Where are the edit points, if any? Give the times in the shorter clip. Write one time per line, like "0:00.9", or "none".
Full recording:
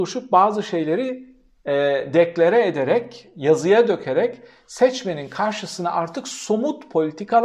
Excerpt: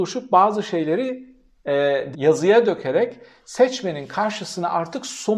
0:02.1